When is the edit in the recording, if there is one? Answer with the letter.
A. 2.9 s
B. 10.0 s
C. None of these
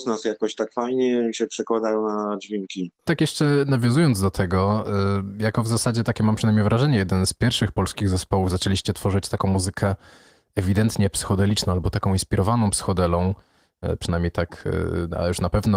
C